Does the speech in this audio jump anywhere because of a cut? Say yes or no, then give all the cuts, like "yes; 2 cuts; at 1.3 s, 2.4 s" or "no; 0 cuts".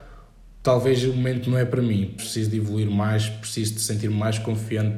yes; 1 cut; at 2.2 s